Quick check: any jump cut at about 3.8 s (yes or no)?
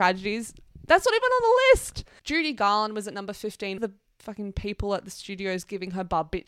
yes